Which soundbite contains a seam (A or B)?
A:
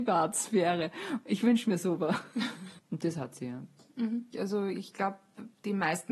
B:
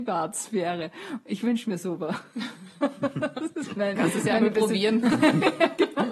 A